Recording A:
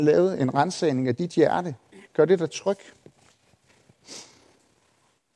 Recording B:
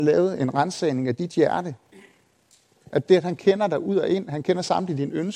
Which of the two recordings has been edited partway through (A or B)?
A